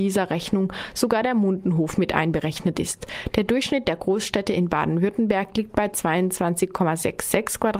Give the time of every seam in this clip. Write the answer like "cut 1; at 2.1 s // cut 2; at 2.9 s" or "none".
none